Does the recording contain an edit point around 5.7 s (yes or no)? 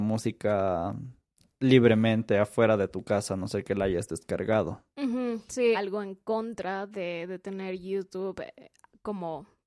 yes